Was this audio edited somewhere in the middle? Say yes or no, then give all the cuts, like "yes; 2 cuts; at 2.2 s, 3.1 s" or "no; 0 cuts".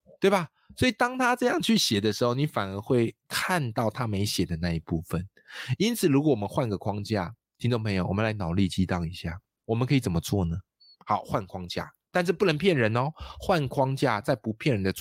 no; 0 cuts